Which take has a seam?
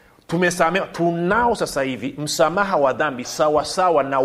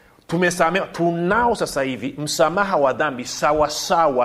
first; 1 cut; at 3.2 s

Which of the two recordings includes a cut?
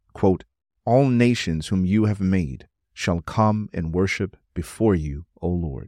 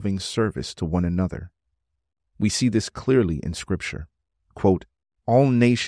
second; 1 cut; at 2.2 s

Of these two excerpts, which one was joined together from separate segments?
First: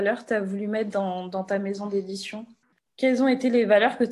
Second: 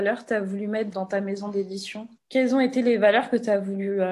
second; 2 cuts; at 0.9 s, 2.2 s

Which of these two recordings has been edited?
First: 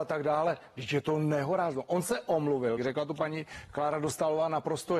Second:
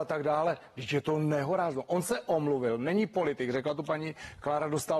first; 1 cut; at 2.8 s

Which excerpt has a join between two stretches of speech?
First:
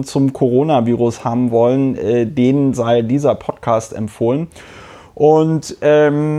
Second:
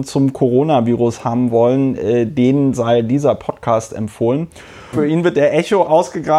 second; 1 cut; at 4.9 s

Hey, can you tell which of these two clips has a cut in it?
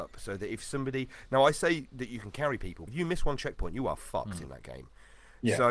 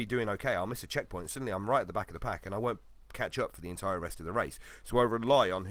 first; 1 cut; at 2.9 s

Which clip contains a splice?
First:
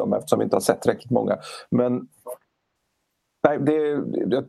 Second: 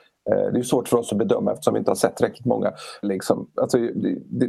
second; 1 cut; at 3.0 s

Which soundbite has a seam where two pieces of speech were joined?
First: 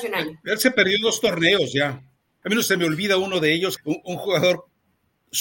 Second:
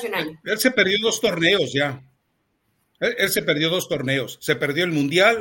first; 2 cuts; at 2.4 s, 3.8 s

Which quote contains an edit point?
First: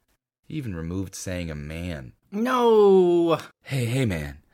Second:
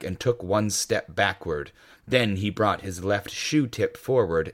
first; 2 cuts; at 2.2 s, 3.5 s

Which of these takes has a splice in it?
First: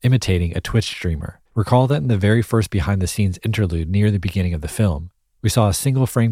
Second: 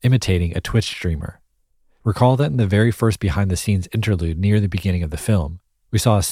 first; 1 cut; at 1.5 s

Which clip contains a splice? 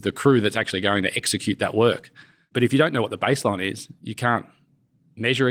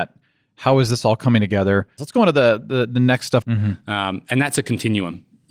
second; 2 cuts; at 2.0 s, 3.4 s

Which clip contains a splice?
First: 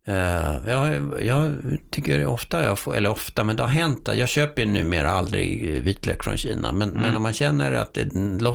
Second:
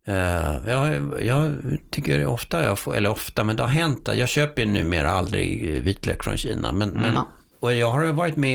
second; 1 cut; at 7.1 s

